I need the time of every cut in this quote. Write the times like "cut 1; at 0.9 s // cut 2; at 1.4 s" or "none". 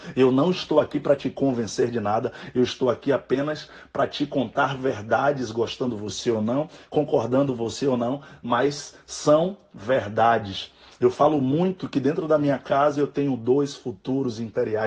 none